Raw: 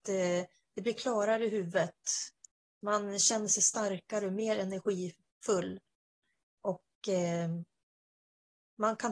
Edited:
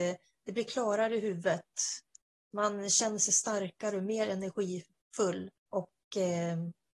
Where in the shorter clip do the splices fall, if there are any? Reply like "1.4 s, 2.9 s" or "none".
5.6 s

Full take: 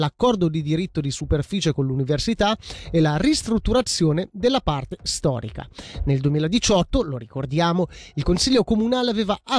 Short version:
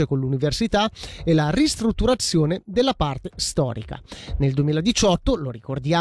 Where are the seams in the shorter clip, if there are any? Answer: none

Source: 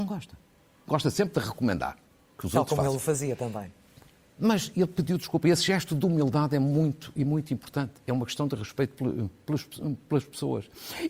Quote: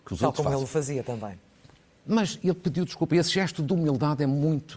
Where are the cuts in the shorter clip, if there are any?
none

